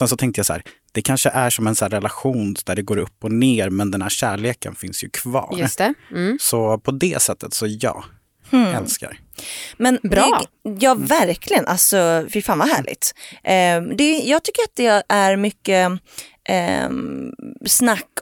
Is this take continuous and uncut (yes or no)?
yes